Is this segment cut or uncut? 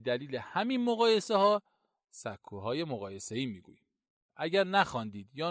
cut